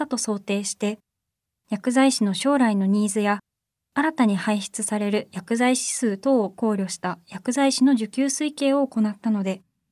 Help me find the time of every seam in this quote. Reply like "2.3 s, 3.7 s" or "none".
none